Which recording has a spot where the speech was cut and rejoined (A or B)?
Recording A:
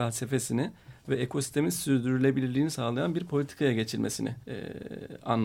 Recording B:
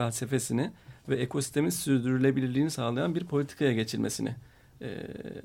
A